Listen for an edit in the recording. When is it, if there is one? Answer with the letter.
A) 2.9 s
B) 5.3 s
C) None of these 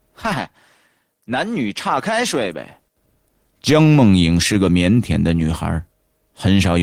A